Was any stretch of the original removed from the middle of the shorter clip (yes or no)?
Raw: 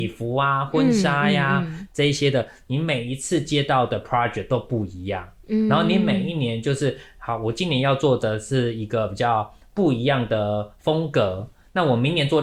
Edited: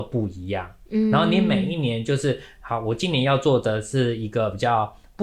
no